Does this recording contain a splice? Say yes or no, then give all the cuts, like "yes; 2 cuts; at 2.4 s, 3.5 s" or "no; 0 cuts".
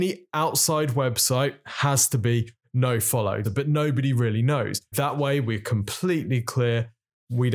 yes; 2 cuts; at 3.4 s, 4.9 s